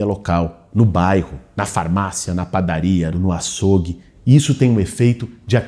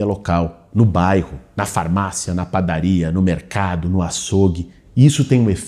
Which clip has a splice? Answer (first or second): first